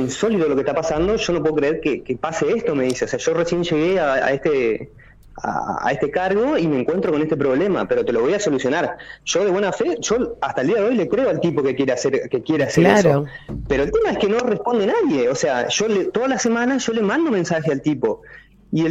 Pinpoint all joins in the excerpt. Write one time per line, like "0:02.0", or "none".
none